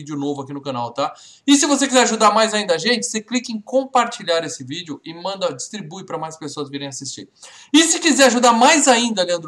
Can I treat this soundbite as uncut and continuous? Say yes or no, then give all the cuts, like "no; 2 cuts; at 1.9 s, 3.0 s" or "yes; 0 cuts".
yes; 0 cuts